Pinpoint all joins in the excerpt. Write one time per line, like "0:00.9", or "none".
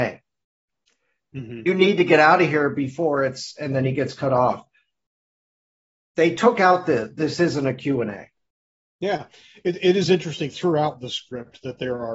none